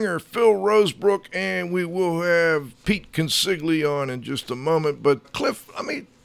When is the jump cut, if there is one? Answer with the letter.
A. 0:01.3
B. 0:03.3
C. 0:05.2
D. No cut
C